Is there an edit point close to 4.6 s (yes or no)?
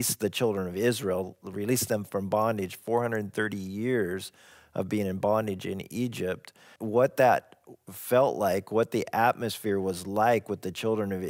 no